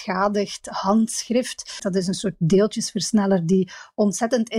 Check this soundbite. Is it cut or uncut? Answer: cut